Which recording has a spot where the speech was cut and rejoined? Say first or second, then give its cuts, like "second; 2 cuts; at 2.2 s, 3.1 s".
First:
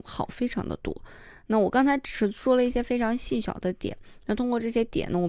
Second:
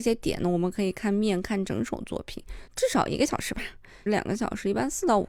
second; 2 cuts; at 2.7 s, 4.1 s